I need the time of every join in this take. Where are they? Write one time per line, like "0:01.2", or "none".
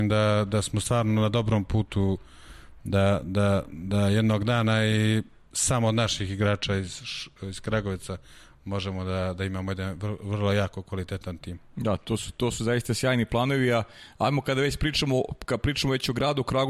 none